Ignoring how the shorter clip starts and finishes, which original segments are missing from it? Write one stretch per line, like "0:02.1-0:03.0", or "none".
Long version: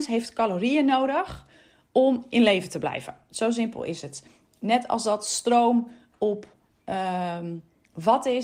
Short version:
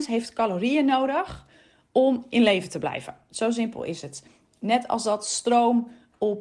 none